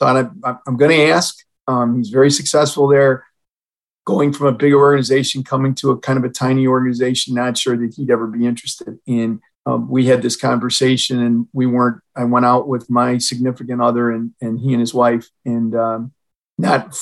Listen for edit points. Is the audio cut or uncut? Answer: cut